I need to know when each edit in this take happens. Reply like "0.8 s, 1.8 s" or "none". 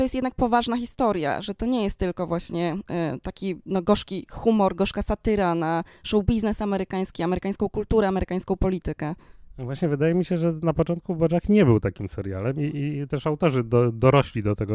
none